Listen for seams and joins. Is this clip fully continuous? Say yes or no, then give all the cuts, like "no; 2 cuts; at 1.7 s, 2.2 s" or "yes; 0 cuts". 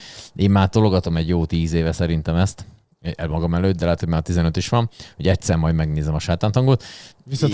yes; 0 cuts